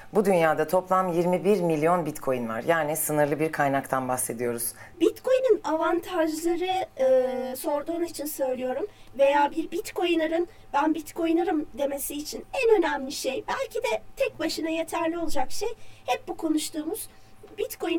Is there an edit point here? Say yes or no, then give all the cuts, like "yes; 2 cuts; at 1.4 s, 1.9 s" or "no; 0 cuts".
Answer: yes; 1 cut; at 4.9 s